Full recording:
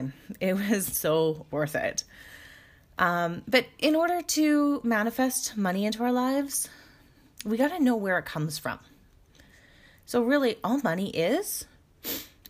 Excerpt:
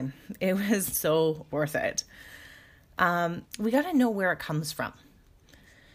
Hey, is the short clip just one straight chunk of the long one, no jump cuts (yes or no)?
no